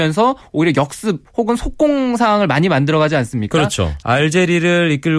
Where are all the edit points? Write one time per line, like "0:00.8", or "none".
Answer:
0:04.0